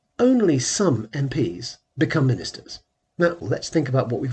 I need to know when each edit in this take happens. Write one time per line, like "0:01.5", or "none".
0:03.4